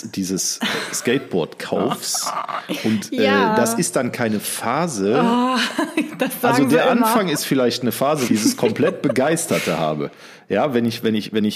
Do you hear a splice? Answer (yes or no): yes